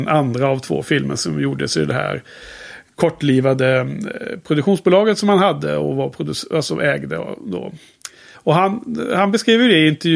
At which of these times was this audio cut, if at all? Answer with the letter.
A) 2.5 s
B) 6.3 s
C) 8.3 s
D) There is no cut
C